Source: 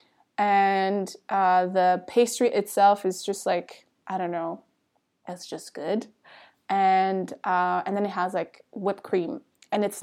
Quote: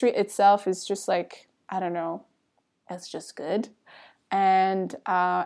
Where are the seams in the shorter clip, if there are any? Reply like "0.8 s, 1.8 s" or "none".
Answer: none